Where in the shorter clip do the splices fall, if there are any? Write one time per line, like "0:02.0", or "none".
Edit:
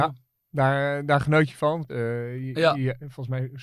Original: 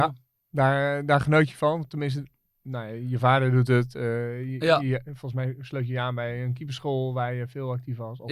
0:01.9